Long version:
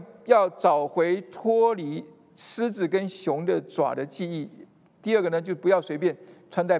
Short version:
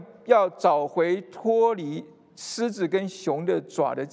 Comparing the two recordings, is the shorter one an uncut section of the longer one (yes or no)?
yes